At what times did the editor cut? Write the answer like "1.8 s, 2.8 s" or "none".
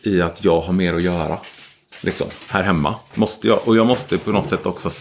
3.1 s